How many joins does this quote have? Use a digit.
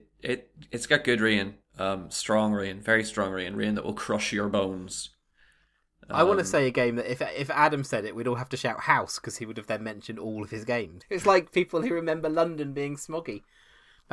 1